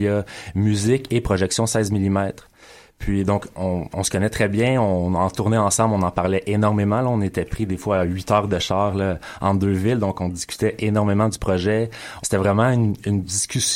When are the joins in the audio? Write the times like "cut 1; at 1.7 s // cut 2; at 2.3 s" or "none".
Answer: cut 1; at 12.2 s